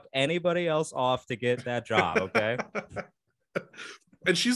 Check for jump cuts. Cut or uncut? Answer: uncut